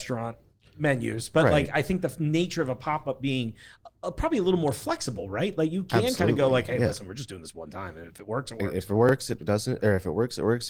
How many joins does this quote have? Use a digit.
0